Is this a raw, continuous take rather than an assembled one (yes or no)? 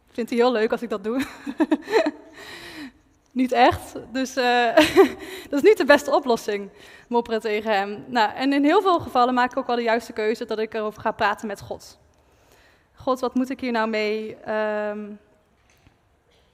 yes